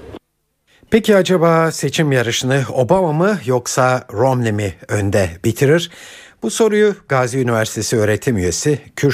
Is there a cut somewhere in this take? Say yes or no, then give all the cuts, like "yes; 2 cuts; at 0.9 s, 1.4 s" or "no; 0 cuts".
no; 0 cuts